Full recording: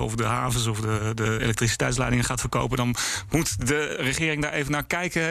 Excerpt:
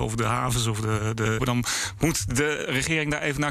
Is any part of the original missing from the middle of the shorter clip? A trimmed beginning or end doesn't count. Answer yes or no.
yes